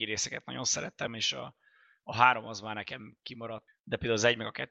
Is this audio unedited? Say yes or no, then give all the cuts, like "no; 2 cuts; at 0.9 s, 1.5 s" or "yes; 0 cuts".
no; 2 cuts; at 1.1 s, 3.7 s